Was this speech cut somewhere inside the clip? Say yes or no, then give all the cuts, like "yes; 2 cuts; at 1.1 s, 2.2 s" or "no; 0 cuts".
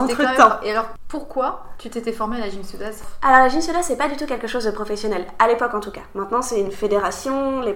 no; 0 cuts